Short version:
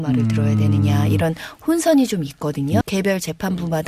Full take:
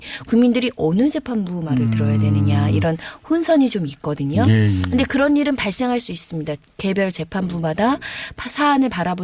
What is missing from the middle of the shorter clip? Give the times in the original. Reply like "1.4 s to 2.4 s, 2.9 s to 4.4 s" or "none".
4.4 s to 6.7 s